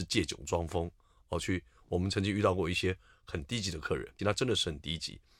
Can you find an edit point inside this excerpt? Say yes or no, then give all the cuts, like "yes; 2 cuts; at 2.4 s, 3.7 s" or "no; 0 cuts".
yes; 1 cut; at 4.2 s